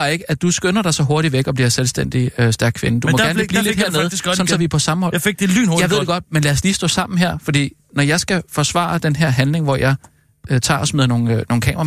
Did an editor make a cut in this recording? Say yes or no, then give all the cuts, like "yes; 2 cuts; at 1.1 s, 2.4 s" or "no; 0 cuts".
no; 0 cuts